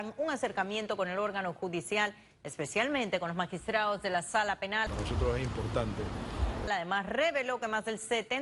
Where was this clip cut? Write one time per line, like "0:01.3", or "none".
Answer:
0:04.9
0:06.7